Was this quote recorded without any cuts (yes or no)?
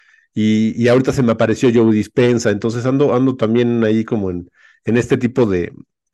yes